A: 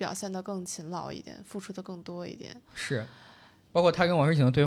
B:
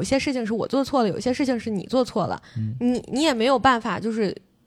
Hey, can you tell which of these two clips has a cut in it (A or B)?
A